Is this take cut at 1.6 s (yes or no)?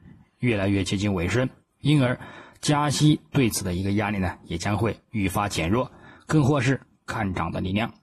no